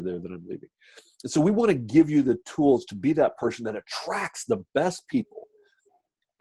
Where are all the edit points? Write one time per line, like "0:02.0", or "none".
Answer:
none